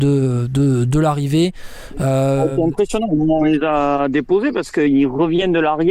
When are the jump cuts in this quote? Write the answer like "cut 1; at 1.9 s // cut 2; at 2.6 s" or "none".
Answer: none